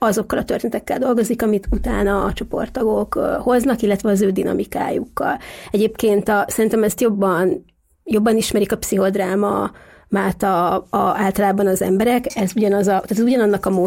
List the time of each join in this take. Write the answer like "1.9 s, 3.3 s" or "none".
none